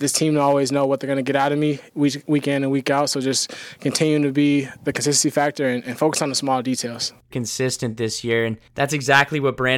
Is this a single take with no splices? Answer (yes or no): no